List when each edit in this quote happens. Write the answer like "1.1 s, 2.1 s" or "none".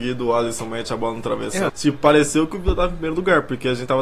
1.7 s